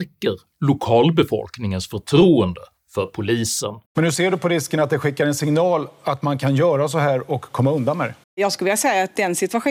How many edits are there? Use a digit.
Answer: 2